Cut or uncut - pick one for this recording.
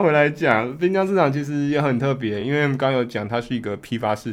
uncut